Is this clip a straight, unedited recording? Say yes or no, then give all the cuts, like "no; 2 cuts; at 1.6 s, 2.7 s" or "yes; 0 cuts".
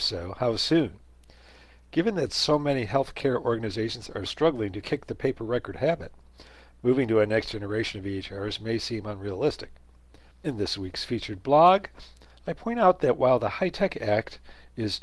no; 2 cuts; at 4.3 s, 10.3 s